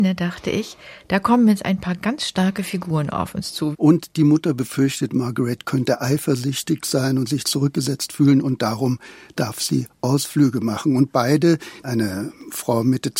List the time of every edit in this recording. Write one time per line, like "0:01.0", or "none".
0:03.7
0:11.8